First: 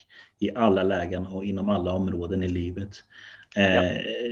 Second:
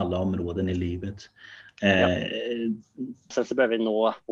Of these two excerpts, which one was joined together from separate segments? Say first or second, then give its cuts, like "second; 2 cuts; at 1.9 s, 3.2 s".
second; 1 cut; at 3.3 s